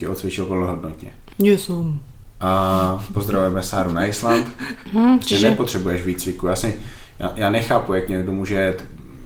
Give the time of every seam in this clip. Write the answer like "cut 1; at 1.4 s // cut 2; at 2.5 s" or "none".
cut 1; at 1.3 s // cut 2; at 4.9 s